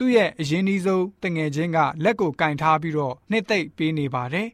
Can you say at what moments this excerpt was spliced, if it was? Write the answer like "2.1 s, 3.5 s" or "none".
3.2 s